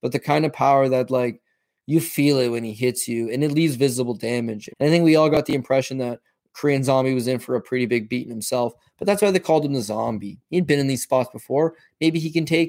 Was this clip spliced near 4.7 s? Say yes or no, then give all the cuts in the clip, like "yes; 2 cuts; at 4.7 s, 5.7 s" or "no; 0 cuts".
yes; 1 cut; at 4.7 s